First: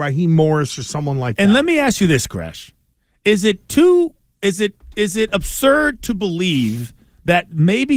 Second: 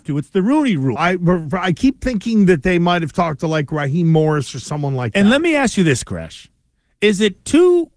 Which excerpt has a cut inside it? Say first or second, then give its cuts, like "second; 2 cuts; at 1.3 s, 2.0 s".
second; 1 cut; at 1.0 s